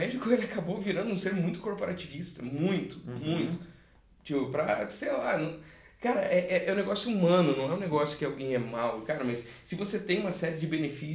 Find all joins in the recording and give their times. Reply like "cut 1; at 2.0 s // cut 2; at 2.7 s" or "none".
none